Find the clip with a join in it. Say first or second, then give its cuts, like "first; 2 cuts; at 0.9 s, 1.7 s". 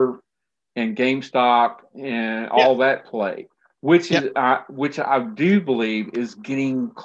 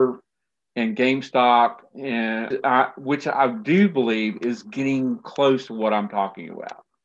second; 1 cut; at 2.5 s